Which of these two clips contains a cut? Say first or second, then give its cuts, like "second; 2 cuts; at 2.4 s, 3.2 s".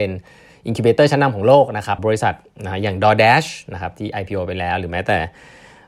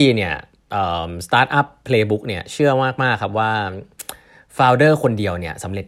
first; 1 cut; at 2.0 s